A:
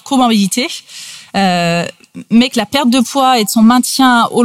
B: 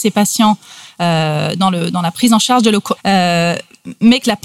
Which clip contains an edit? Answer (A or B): B